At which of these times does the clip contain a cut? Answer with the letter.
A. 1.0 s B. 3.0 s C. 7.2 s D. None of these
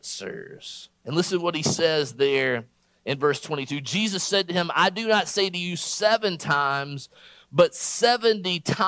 A